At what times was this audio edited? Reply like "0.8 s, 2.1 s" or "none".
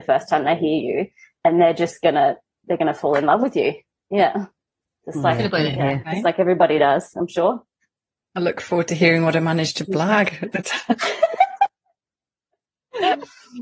none